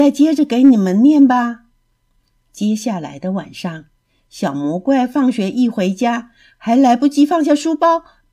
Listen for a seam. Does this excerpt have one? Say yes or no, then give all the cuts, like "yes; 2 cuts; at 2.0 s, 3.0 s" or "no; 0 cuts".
no; 0 cuts